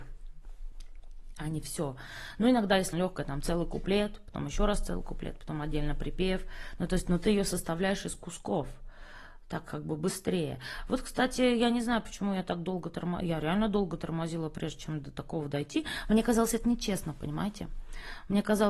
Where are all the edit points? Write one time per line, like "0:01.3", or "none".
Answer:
0:02.9